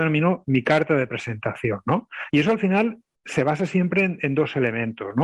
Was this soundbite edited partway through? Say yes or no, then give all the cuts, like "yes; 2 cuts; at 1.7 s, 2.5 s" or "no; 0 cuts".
yes; 1 cut; at 2.3 s